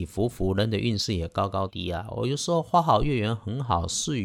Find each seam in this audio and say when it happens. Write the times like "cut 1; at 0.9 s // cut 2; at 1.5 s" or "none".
cut 1; at 1.7 s